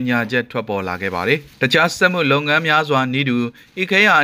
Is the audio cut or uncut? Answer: uncut